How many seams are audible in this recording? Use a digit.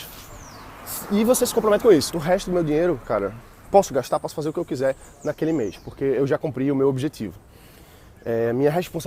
1